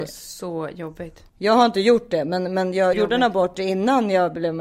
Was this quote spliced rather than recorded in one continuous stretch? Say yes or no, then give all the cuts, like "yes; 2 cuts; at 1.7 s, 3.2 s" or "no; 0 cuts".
yes; 2 cuts; at 1.3 s, 2.9 s